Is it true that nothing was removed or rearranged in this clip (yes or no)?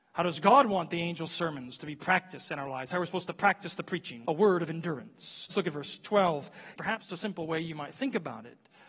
no